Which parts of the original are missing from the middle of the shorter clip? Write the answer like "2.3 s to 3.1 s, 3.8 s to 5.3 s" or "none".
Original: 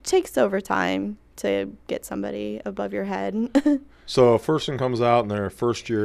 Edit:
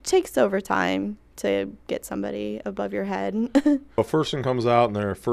4.0 s to 4.3 s